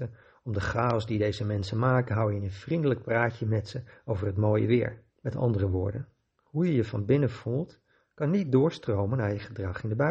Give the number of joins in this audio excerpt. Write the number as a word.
one